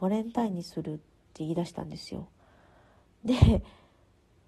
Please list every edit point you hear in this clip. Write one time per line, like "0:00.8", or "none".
none